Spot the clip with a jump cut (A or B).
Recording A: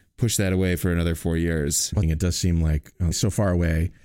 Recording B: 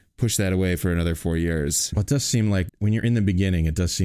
A